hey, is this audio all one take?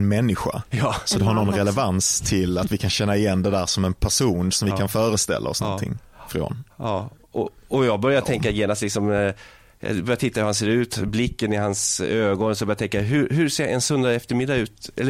yes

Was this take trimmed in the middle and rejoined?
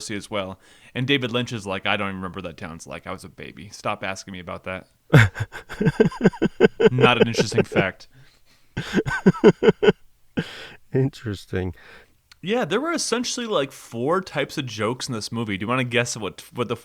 no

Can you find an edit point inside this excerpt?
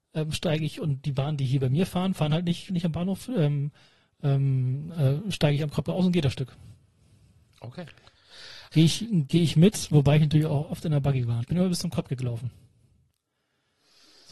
yes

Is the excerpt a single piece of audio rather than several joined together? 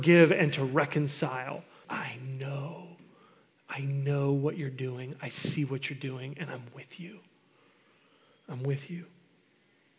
no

